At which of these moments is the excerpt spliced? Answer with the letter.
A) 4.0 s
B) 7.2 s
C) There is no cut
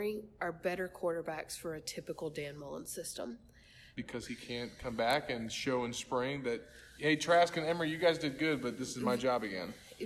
A